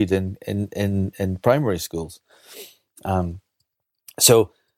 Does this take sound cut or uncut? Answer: uncut